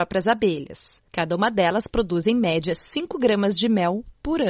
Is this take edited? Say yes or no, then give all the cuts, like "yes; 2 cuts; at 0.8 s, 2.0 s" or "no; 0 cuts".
no; 0 cuts